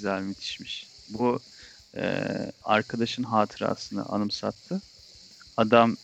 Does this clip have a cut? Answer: yes; 1 cut; at 2.6 s

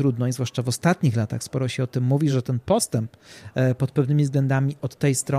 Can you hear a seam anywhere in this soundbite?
no; 0 cuts

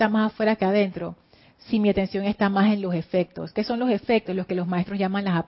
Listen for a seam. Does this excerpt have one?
no; 0 cuts

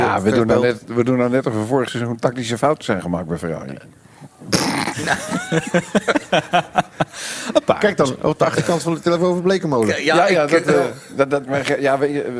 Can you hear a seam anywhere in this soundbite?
no; 0 cuts

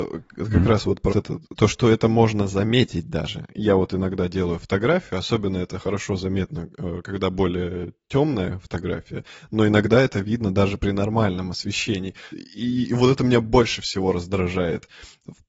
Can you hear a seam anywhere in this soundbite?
yes; 2 cuts; at 1.1 s, 12.3 s

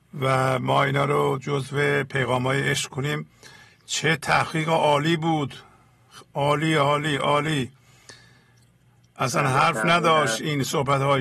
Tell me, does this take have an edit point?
no; 0 cuts

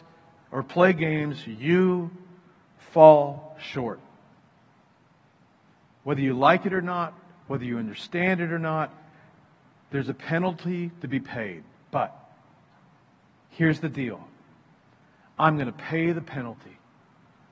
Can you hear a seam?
no; 0 cuts

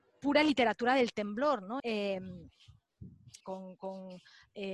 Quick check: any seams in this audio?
yes; 2 cuts; at 1.8 s, 3.4 s

